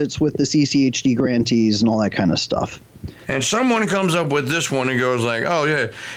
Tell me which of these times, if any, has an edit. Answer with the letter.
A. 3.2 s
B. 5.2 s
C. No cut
A